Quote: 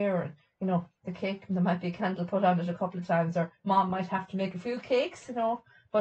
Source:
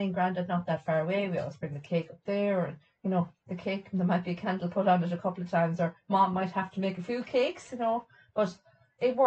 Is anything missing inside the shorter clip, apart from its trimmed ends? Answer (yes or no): no